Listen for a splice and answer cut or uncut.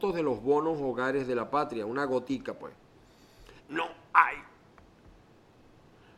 cut